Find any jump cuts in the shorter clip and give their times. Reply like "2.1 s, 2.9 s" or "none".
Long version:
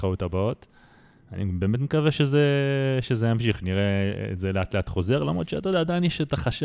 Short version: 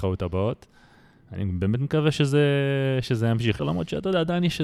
3.6 s